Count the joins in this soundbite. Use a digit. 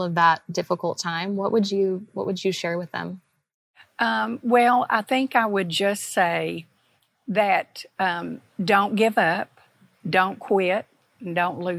0